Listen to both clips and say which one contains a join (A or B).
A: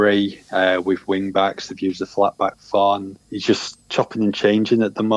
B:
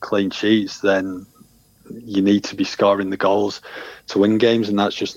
A